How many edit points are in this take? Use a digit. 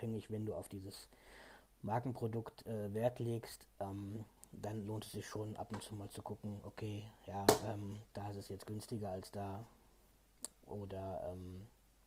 0